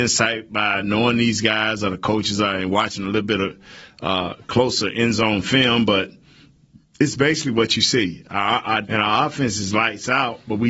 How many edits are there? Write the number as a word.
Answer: one